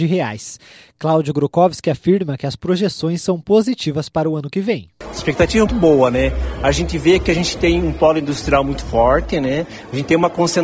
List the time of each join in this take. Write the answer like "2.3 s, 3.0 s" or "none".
5.7 s